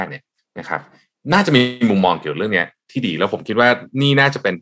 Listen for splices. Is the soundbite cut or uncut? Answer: uncut